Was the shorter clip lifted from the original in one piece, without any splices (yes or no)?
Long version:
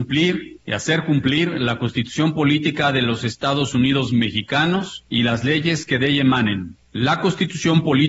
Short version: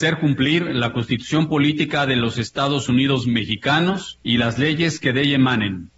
yes